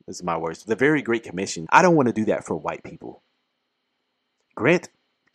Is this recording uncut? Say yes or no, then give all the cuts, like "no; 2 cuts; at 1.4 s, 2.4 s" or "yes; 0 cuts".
no; 1 cut; at 1.7 s